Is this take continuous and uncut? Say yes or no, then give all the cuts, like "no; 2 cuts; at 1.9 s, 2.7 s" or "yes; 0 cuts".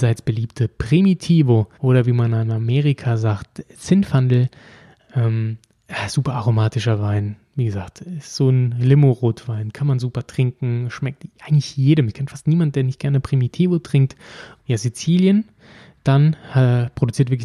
no; 2 cuts; at 1.7 s, 14.6 s